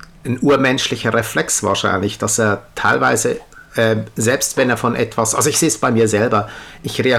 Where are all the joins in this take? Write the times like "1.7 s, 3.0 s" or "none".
none

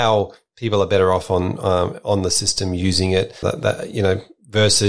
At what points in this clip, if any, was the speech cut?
3.4 s

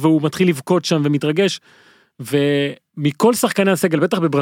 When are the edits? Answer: none

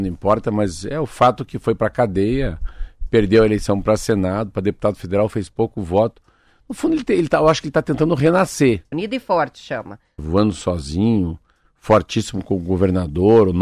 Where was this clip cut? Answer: 8.9 s, 10.2 s

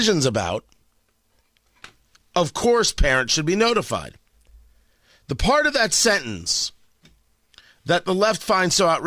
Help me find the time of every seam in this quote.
none

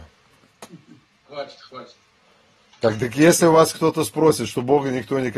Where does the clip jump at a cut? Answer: none

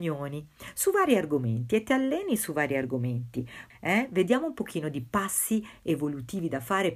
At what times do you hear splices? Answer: 3.7 s

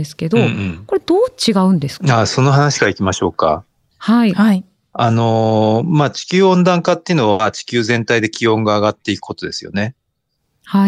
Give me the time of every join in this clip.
none

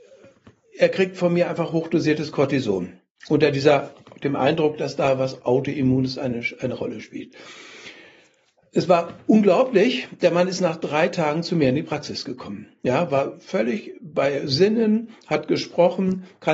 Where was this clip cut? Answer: none

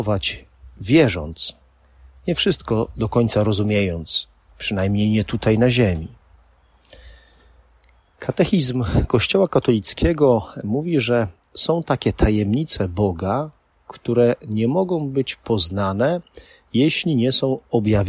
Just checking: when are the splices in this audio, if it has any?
none

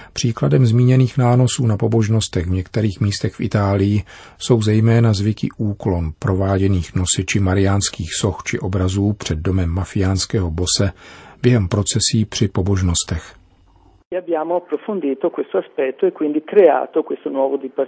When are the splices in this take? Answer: 14.0 s

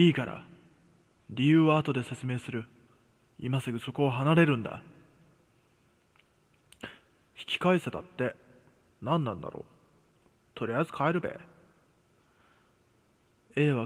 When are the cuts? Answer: none

